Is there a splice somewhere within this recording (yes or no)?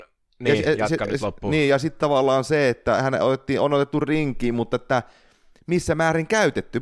no